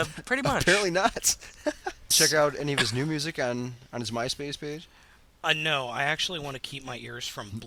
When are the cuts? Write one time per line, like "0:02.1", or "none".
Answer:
0:02.1